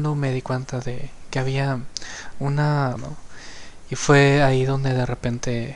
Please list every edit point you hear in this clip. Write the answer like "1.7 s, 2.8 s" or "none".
3.0 s